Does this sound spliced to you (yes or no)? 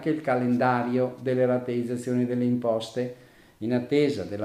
no